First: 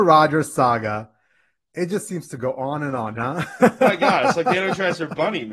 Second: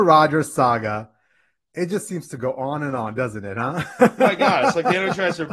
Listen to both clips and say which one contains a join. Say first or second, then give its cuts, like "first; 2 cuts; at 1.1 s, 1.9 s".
first; 1 cut; at 3.2 s